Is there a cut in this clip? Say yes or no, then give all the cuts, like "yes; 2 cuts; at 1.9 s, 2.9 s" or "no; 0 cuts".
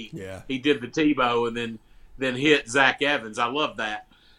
no; 0 cuts